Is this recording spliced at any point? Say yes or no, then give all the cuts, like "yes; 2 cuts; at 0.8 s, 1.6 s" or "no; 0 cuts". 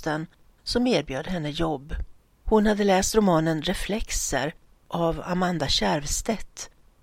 yes; 1 cut; at 2.4 s